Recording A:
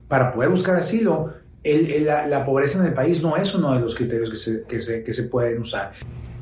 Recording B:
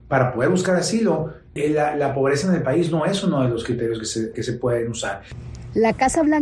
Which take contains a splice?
B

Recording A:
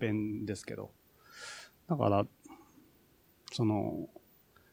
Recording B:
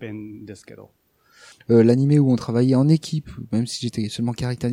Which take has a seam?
B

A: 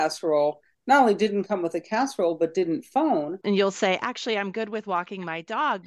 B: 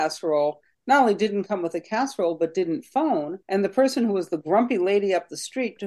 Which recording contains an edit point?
A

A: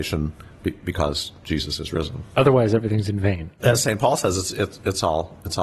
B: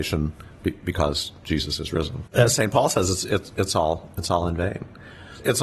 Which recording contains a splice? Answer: B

